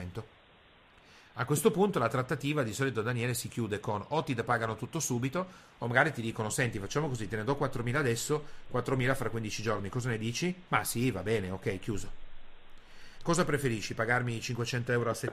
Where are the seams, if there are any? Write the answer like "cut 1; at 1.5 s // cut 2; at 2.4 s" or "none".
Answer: cut 1; at 10.7 s // cut 2; at 13.2 s